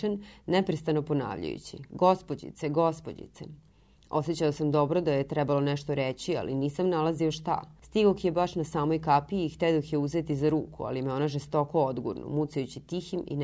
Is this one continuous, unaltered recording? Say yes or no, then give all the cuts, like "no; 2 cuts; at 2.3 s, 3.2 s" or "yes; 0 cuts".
yes; 0 cuts